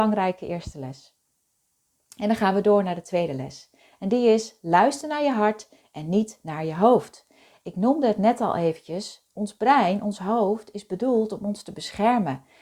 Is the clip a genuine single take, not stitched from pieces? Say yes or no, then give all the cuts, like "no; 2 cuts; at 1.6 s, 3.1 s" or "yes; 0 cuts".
yes; 0 cuts